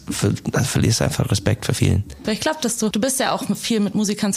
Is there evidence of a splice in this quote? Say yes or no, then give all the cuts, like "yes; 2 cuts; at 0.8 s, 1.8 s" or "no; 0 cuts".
yes; 1 cut; at 2.2 s